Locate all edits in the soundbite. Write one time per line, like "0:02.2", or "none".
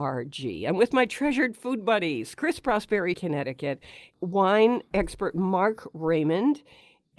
0:03.1